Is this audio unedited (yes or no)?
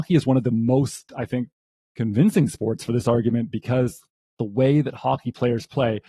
yes